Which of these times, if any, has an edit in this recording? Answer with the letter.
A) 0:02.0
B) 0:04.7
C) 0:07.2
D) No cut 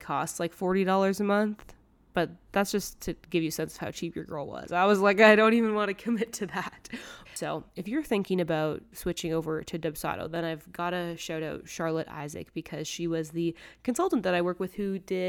C